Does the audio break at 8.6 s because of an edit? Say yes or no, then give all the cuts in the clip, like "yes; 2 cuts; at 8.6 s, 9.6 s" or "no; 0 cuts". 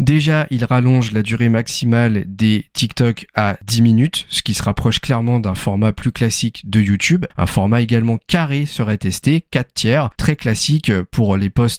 no; 2 cuts; at 7.3 s, 10.2 s